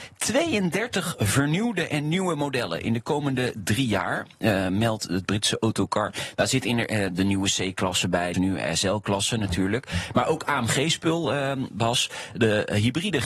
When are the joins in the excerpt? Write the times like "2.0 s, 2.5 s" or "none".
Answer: 8.3 s